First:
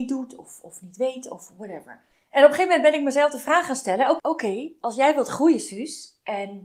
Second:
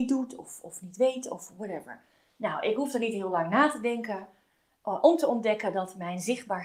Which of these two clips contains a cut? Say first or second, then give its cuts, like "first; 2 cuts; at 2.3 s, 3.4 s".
first; 2 cuts; at 2.1 s, 4.2 s